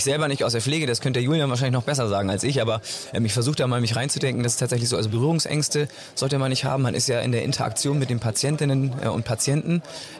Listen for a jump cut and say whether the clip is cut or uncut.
uncut